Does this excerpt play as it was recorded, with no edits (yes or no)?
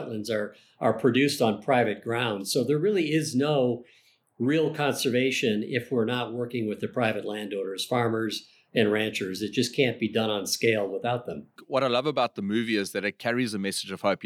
yes